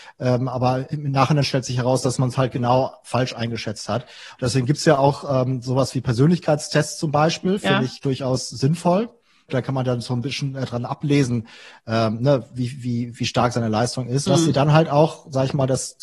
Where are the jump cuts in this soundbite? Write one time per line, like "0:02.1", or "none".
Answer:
0:09.5
0:14.3